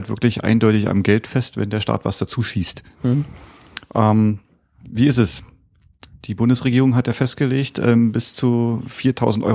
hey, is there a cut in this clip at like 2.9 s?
no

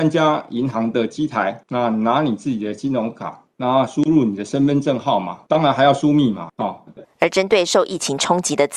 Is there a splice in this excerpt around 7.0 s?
yes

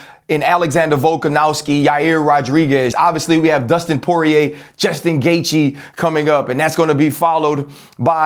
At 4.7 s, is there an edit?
no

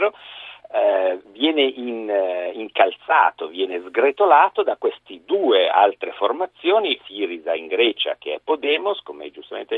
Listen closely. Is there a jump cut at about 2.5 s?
no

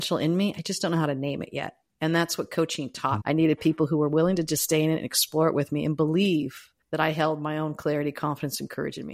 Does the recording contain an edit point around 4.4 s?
no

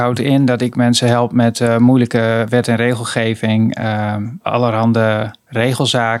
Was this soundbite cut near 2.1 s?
no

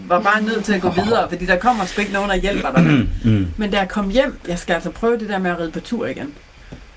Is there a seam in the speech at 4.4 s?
yes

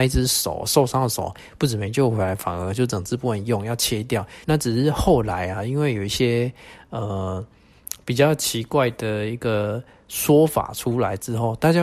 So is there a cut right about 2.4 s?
no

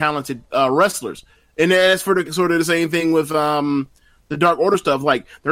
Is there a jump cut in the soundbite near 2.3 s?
yes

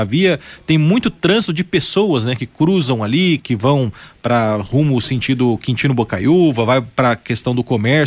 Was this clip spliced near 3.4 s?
yes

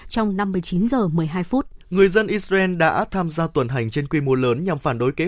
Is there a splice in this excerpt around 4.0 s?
no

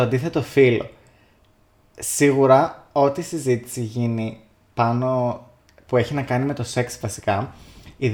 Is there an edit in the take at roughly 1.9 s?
no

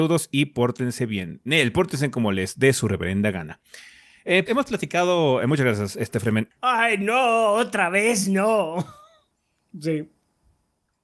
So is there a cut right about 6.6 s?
yes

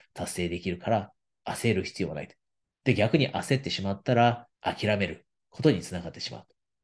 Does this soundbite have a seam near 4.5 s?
yes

